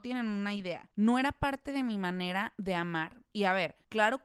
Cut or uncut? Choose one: cut